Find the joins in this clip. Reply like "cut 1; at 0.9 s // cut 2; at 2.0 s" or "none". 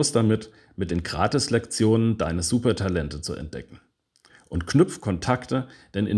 none